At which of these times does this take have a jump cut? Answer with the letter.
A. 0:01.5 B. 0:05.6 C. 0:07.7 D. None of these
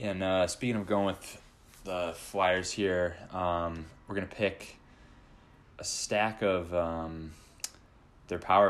B